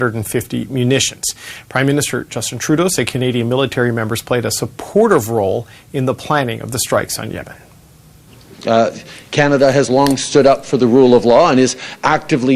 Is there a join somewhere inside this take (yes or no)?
no